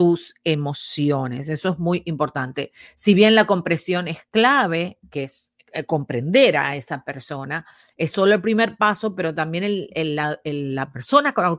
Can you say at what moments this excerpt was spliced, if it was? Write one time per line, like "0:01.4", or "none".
none